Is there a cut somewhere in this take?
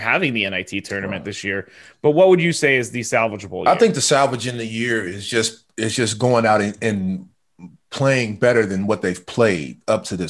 no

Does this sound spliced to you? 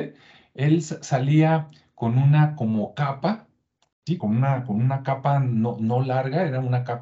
yes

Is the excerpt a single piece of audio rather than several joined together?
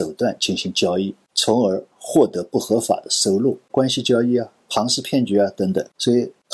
no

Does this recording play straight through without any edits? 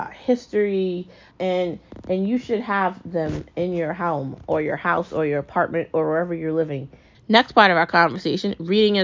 no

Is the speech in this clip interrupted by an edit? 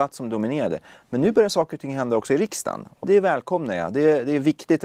yes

